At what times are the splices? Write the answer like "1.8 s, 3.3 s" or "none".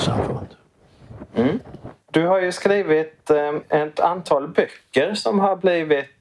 2.0 s